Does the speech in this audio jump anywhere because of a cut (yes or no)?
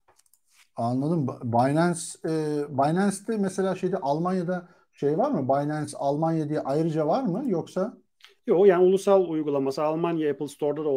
no